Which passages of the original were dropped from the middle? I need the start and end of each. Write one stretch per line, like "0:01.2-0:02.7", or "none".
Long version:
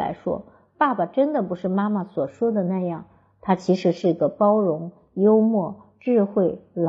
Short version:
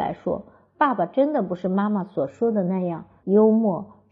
0:03.2-0:05.1